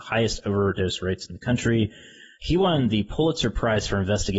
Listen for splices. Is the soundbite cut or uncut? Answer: cut